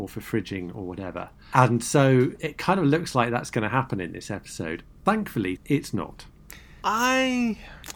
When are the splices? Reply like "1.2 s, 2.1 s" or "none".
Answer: 5.6 s